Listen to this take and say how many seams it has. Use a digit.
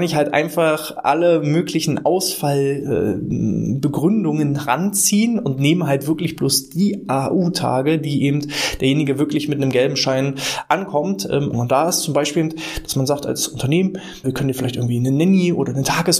2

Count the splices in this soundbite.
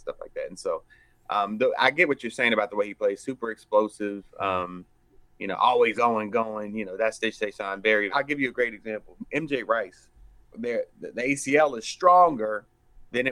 3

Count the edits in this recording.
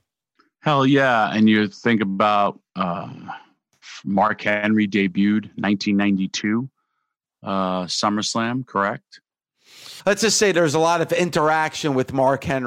1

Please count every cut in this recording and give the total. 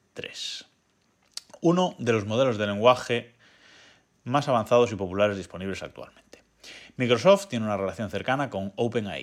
0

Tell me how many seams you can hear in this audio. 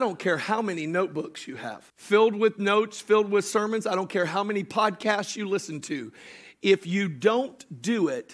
1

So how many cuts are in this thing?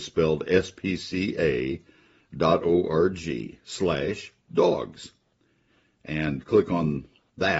0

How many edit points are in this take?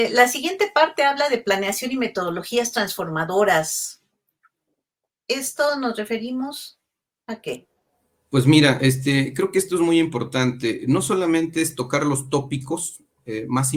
0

